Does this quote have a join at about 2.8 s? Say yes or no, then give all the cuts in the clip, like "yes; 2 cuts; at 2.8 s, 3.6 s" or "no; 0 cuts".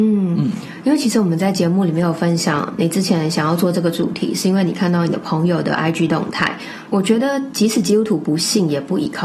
no; 1 cut; at 6.9 s